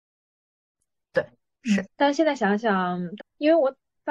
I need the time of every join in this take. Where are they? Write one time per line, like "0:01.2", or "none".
0:01.8
0:03.2